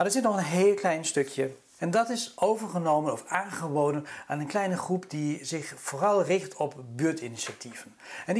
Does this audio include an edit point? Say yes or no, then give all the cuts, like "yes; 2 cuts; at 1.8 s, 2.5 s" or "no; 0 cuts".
yes; 1 cut; at 1.8 s